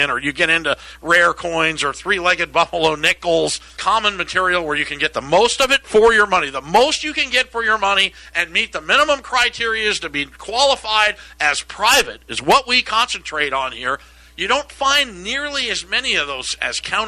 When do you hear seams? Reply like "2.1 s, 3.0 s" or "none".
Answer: 3.8 s